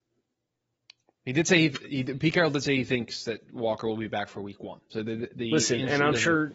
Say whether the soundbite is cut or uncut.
uncut